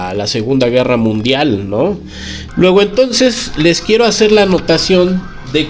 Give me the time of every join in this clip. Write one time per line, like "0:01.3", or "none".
0:02.5